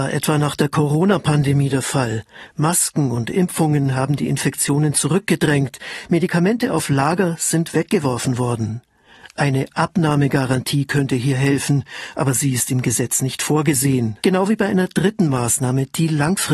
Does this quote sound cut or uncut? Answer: cut